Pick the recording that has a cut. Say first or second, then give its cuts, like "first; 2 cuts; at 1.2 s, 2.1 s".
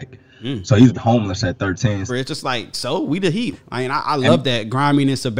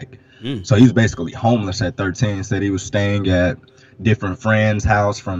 first; 3 cuts; at 0.9 s, 2.1 s, 3.5 s